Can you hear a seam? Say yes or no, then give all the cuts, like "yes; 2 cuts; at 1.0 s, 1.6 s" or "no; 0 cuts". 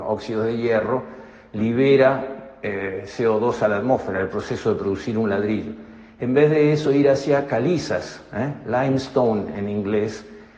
no; 0 cuts